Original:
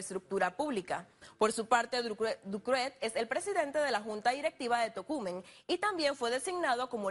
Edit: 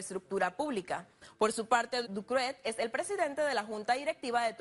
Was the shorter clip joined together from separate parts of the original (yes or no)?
yes